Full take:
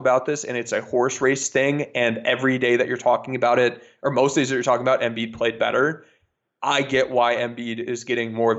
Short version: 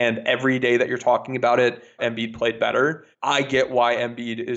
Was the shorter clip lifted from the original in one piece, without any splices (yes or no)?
no